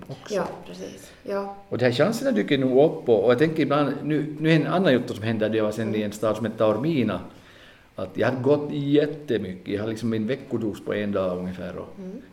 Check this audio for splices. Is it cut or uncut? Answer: uncut